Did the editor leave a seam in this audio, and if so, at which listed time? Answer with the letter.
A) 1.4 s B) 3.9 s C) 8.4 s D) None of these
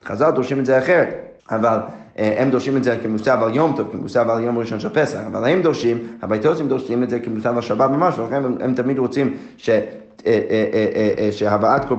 A